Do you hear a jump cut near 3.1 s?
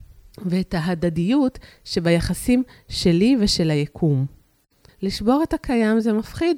no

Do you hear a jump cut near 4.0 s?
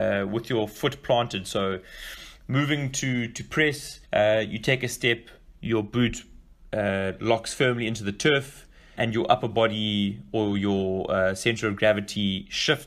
yes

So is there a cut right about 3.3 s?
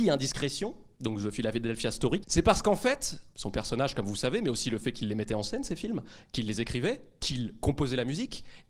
yes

